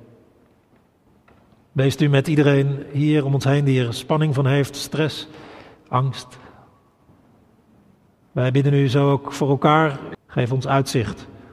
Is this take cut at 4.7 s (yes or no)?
no